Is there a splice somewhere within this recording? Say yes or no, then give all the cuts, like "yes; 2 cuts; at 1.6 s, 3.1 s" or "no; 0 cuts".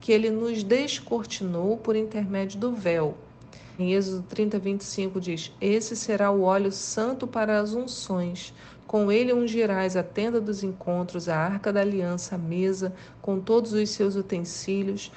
yes; 1 cut; at 3.8 s